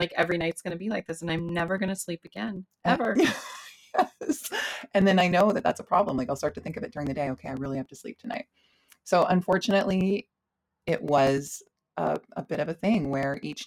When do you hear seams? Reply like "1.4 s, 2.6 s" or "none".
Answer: none